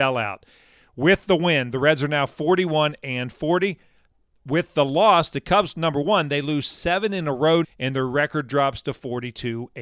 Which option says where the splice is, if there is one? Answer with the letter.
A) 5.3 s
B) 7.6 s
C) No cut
B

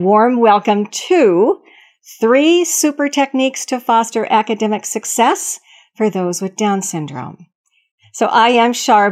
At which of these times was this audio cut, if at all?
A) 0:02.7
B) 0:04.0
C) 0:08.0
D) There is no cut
D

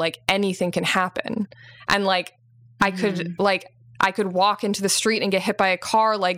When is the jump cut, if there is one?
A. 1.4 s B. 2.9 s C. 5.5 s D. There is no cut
D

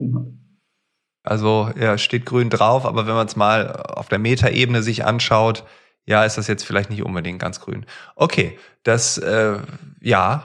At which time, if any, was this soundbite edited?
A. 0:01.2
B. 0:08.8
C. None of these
A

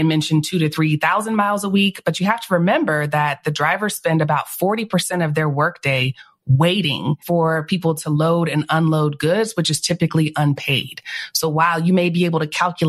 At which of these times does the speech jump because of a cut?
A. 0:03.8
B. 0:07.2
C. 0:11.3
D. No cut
B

